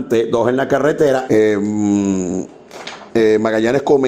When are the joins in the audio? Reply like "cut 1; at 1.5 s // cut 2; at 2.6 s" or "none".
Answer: cut 1; at 1.3 s // cut 2; at 3.1 s